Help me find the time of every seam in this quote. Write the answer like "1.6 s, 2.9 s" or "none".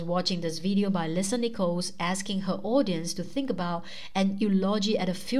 none